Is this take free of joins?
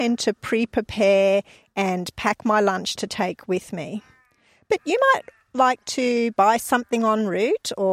yes; 0 cuts

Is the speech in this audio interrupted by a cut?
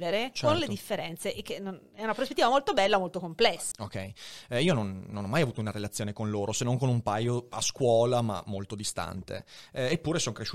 yes; 1 cut; at 3.7 s

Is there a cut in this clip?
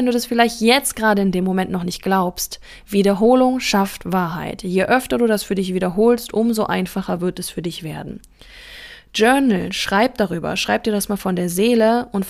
no; 0 cuts

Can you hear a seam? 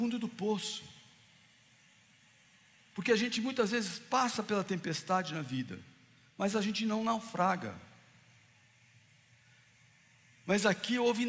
no; 0 cuts

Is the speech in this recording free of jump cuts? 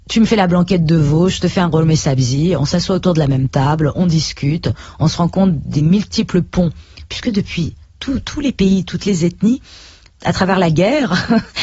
yes; 0 cuts

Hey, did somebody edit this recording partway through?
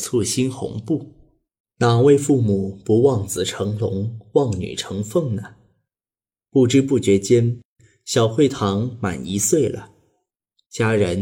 yes; 1 cut; at 1.6 s

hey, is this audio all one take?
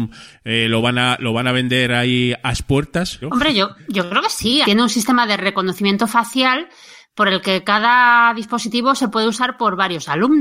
no; 2 cuts; at 3.2 s, 4.6 s

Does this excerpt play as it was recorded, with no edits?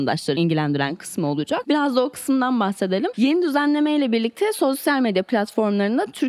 no; 1 cut; at 3.1 s

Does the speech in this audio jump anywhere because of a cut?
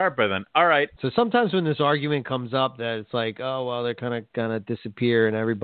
yes; 1 cut; at 1.0 s

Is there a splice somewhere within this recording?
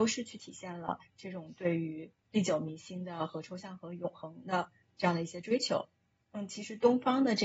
no; 0 cuts

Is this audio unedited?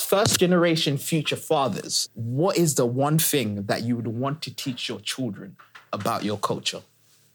no; 1 cut; at 2.1 s

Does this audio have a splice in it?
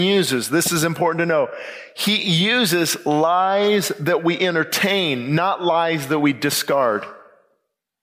no; 0 cuts

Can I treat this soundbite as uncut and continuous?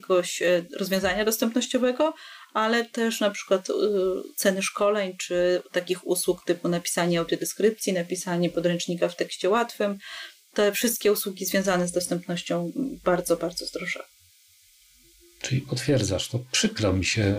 yes; 0 cuts

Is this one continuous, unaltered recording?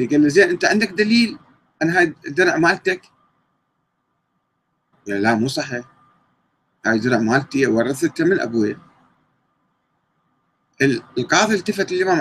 no; 1 cut; at 4.9 s

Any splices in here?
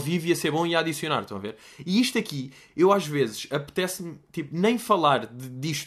no; 0 cuts

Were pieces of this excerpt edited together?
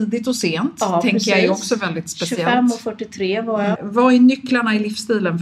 yes; 1 cut; at 3.7 s

